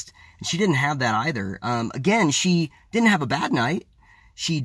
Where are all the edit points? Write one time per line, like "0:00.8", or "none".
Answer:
none

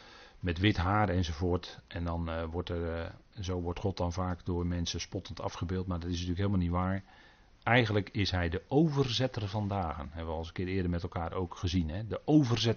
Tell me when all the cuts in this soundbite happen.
none

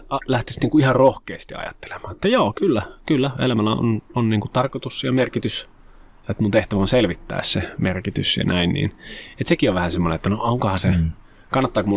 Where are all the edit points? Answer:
none

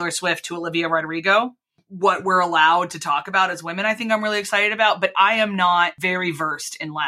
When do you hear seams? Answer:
none

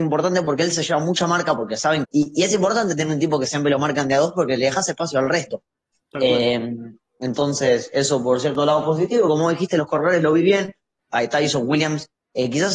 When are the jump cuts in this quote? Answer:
0:02.0

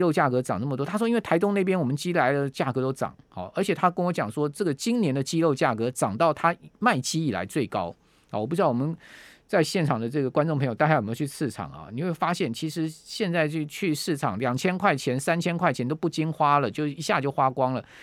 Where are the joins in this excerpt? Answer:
none

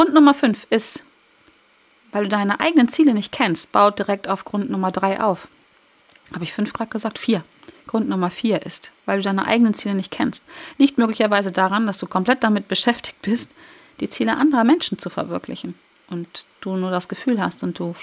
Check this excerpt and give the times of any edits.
none

